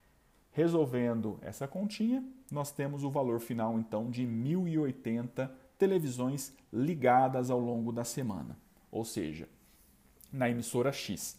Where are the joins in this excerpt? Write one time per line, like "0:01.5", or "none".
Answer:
none